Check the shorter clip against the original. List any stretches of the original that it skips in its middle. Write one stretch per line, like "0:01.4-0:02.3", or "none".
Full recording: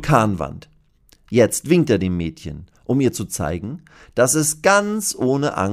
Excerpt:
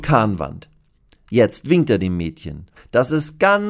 0:02.8-0:04.0